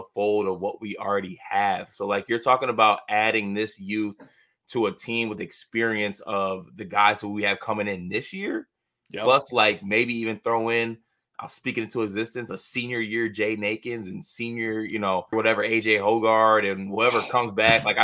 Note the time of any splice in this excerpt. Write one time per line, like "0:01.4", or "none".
0:15.3